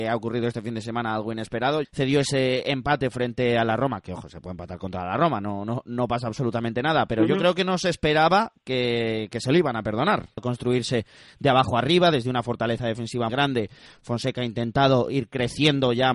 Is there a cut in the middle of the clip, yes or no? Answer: yes